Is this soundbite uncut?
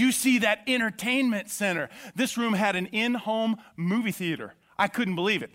yes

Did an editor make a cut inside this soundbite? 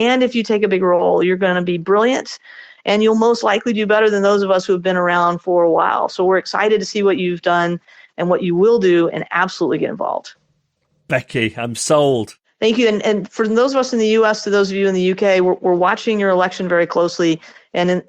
no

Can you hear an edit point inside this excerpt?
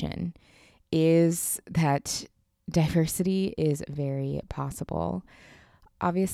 yes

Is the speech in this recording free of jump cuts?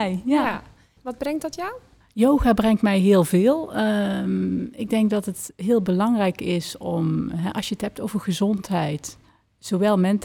no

